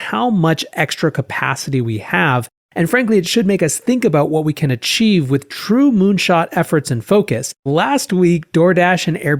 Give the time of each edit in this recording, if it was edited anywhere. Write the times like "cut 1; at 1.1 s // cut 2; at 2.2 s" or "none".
cut 1; at 7.6 s